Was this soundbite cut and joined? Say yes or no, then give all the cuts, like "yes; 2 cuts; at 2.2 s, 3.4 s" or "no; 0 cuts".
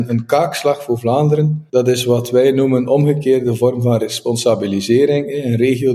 yes; 1 cut; at 1.7 s